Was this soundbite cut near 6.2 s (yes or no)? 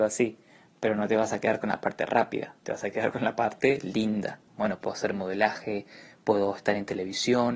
no